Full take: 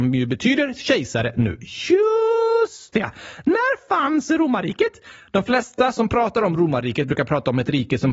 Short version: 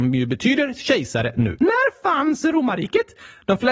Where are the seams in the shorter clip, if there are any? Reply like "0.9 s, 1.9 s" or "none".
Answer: 1.6 s